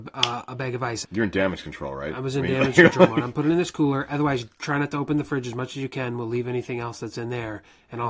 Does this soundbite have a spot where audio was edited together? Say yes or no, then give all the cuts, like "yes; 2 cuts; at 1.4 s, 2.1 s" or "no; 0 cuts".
yes; 1 cut; at 1.0 s